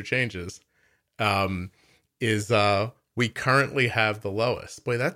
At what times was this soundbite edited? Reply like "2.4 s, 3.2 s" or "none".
none